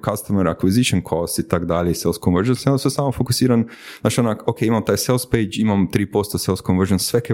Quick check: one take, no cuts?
yes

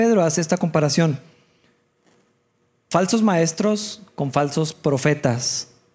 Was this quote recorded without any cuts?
yes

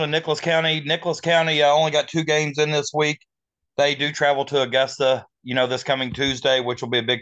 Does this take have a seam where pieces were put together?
no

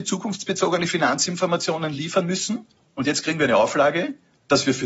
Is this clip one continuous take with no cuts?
no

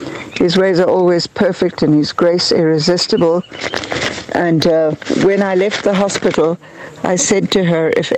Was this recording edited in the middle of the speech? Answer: no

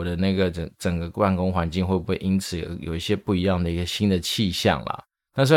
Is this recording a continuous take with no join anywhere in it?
yes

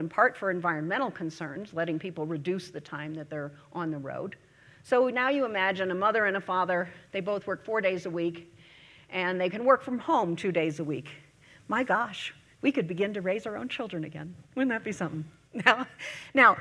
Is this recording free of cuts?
yes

